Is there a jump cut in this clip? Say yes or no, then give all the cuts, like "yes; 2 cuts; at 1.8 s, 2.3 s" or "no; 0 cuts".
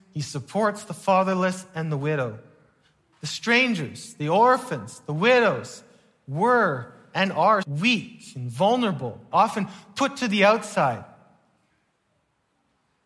yes; 2 cuts; at 7.6 s, 9.3 s